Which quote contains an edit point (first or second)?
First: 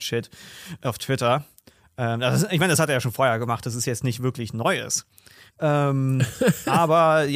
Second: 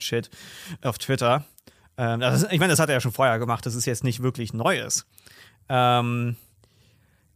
first